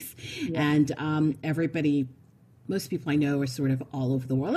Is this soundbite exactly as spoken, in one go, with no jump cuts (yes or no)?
yes